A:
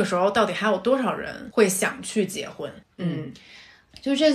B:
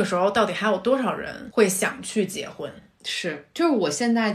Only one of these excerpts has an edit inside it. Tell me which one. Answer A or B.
A